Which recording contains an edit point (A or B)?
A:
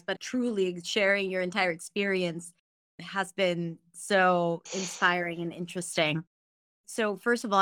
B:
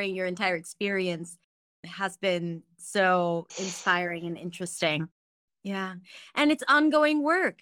B